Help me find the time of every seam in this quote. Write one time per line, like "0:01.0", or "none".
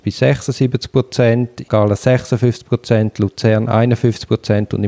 0:01.7

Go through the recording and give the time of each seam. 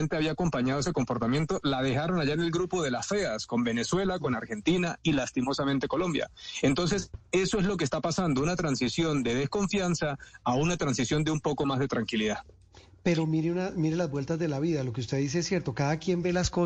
none

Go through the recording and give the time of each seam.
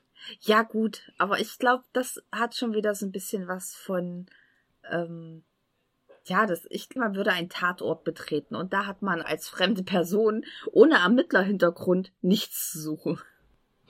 0:07.0
0:09.2

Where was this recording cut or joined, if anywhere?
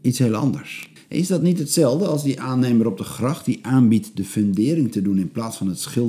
0:01.0

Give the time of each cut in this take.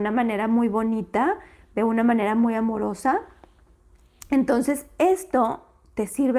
none

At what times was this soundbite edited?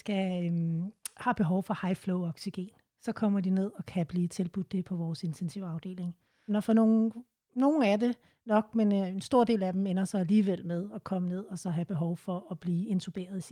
0:06.5

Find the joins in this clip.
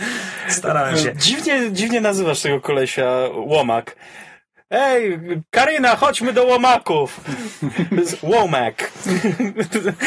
none

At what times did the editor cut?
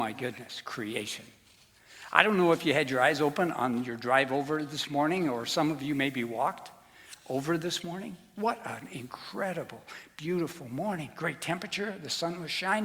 none

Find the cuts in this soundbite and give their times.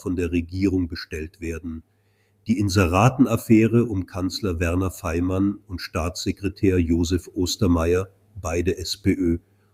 none

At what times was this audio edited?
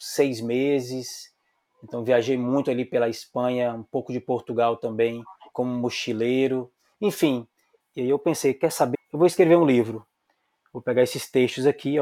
0:05.5
0:07.8
0:08.9

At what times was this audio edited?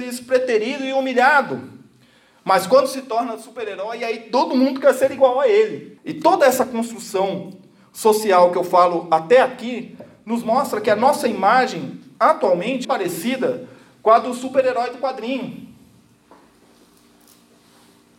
0:06.0
0:12.8

